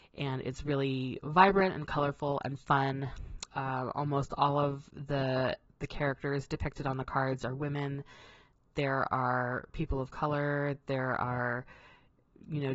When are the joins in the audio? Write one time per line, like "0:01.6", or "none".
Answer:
0:03.5